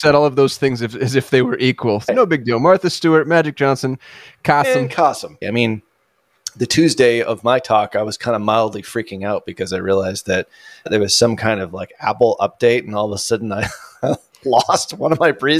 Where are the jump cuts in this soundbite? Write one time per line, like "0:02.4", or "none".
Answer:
0:05.4